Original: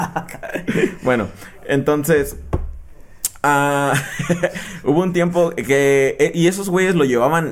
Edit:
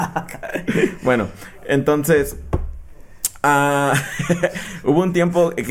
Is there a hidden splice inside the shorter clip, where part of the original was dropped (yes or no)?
no